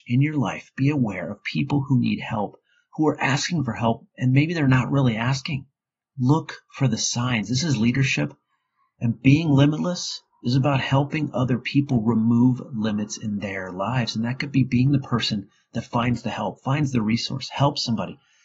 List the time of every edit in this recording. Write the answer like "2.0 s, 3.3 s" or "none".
none